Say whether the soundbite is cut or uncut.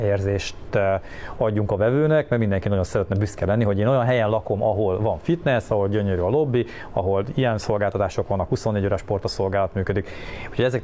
uncut